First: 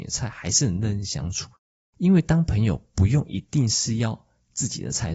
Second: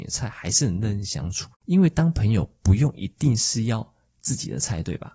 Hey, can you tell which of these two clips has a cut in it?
second; 1 cut; at 1.5 s

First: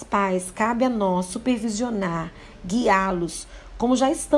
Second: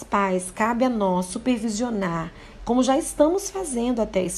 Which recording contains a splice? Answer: second; 1 cut; at 2.6 s

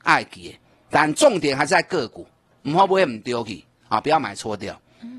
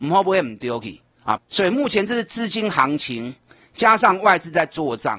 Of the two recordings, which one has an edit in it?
second; 1 cut; at 1.4 s

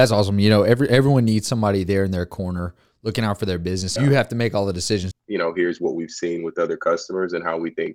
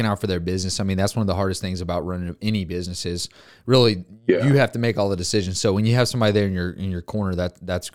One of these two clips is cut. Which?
first; 2 cuts; at 4.0 s, 5.1 s

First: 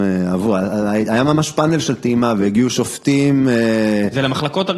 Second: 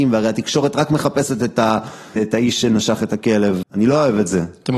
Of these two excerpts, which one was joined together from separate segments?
second; 2 cuts; at 2.2 s, 3.6 s

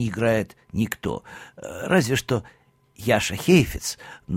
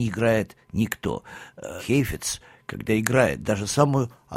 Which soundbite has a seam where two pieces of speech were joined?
second; 1 cut; at 1.8 s

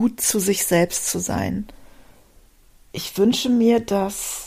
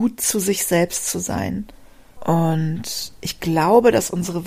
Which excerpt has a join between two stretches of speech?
second; 1 cut; at 2.2 s

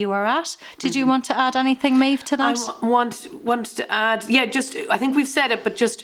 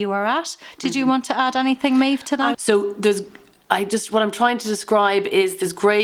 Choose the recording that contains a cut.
second; 1 cut; at 2.5 s

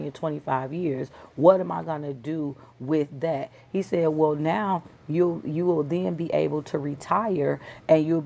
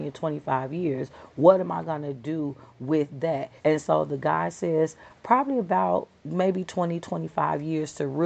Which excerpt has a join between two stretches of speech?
second; 1 cut; at 3.6 s

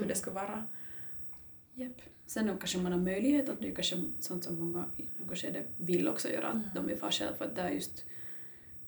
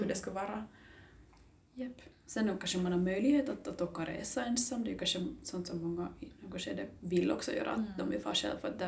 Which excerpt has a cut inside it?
first; 1 cut; at 3.6 s

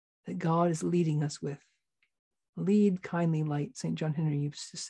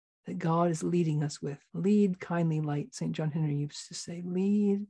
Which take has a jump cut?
second; 1 cut; at 1.7 s

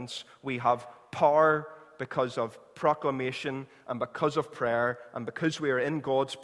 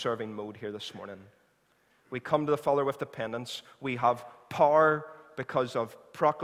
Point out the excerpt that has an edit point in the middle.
second; 1 cut; at 1.9 s

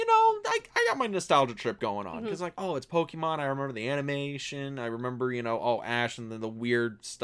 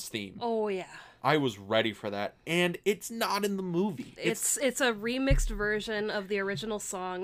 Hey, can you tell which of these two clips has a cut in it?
second; 1 cut; at 4.2 s

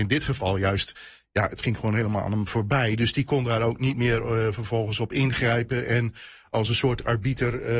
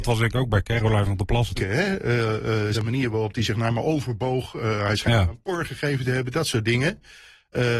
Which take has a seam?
second; 2 cuts; at 1.6 s, 2.7 s

